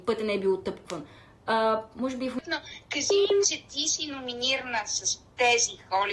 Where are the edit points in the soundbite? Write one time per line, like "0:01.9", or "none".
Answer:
0:03.4